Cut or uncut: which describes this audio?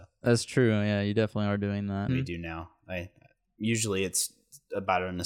cut